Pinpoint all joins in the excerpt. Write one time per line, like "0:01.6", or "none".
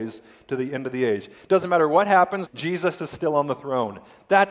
0:02.5